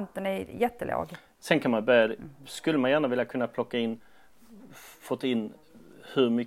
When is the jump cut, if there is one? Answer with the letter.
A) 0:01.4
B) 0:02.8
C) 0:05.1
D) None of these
A